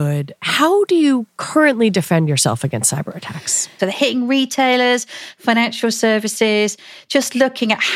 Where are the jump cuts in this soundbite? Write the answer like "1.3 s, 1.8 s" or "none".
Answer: 3.8 s